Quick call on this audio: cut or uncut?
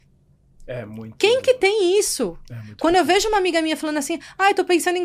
uncut